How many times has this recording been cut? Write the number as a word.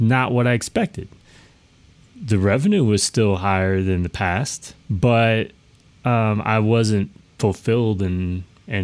one